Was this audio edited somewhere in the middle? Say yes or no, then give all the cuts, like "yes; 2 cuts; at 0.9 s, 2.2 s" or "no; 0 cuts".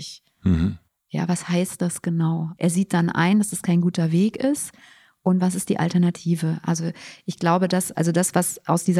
yes; 1 cut; at 2.6 s